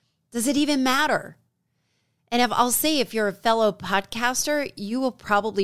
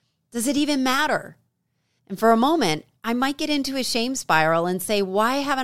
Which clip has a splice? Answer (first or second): second